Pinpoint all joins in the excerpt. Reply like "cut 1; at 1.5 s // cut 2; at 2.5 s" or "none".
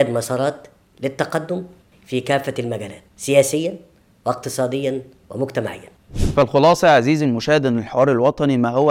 none